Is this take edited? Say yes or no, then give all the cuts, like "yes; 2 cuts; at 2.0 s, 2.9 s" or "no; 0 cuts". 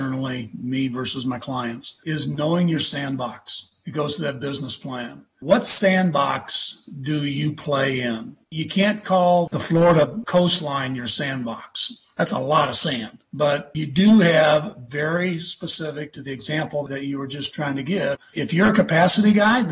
no; 0 cuts